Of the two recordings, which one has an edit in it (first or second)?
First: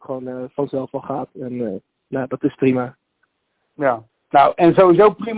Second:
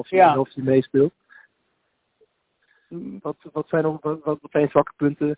second